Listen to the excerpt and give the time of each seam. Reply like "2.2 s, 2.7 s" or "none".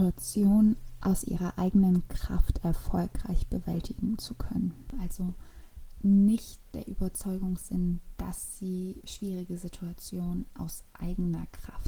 4.9 s